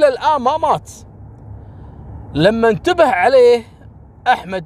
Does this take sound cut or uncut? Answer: uncut